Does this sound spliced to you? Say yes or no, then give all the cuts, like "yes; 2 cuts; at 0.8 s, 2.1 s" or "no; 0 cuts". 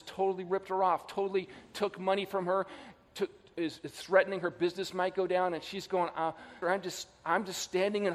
yes; 1 cut; at 6.6 s